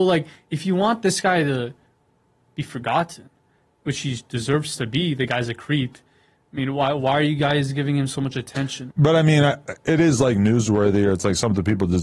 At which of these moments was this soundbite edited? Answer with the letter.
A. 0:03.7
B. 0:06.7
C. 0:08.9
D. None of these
C